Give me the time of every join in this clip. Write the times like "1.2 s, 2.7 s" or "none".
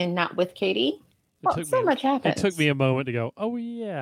1.4 s